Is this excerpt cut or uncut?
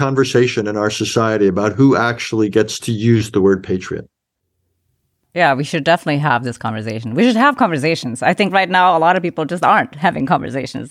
uncut